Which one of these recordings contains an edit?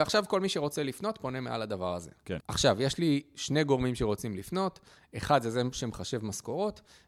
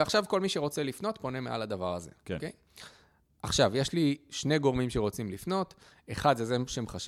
first; 1 cut; at 2.4 s

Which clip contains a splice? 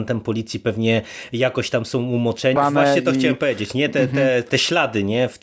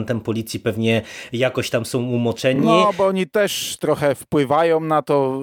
first; 1 cut; at 2.6 s

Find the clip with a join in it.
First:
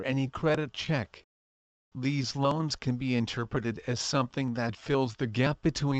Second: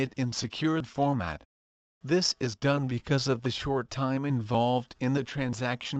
second; 1 cut; at 1.9 s

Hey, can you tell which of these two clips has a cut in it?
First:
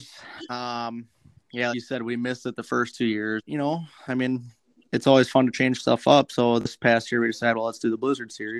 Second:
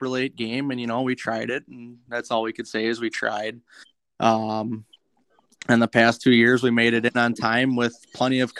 first; 2 cuts; at 1.7 s, 3.4 s

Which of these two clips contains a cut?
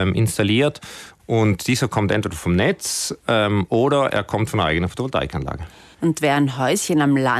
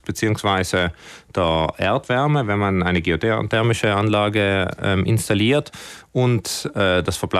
first; 2 cuts; at 1.2 s, 5.9 s

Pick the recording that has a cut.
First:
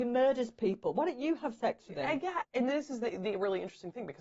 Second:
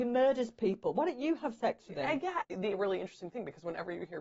second; 1 cut; at 2.5 s

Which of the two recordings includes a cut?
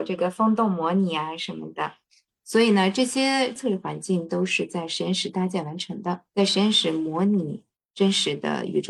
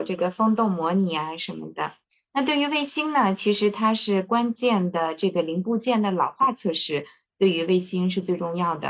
first; 2 cuts; at 2.3 s, 6.3 s

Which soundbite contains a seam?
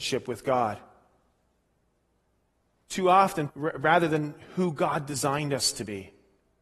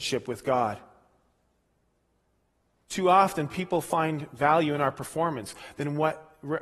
first; 1 cut; at 3.5 s

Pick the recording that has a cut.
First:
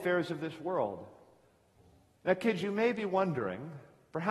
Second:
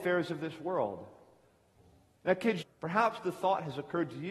second; 1 cut; at 2.6 s

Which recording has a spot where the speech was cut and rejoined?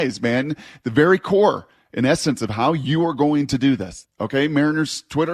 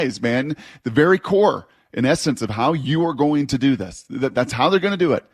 first; 1 cut; at 4.0 s

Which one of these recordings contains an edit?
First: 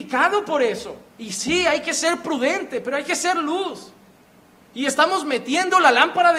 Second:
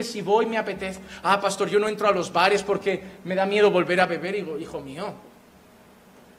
first; 1 cut; at 1.1 s

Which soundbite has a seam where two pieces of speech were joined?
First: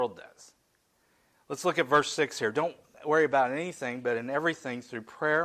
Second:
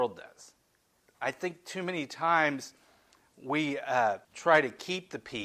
second; 2 cuts; at 1.0 s, 4.2 s

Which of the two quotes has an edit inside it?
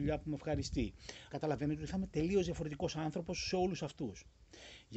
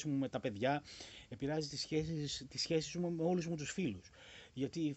first; 1 cut; at 1.3 s

